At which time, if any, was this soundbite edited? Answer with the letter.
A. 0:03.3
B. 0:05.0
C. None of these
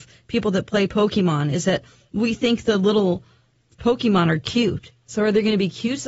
C